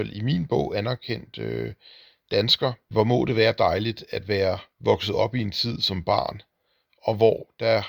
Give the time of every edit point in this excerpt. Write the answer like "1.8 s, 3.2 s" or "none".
2.9 s, 4.7 s, 6.9 s